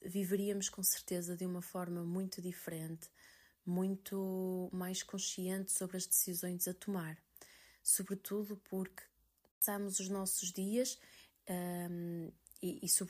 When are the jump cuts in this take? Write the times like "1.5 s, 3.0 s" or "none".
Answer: none